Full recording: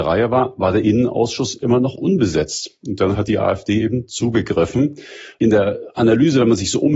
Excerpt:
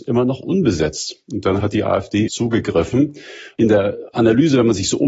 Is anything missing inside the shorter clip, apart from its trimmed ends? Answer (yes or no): yes